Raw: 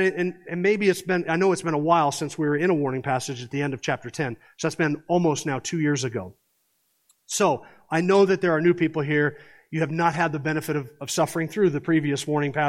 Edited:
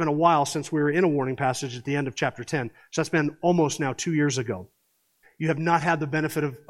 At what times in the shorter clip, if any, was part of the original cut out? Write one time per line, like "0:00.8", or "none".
0:05.2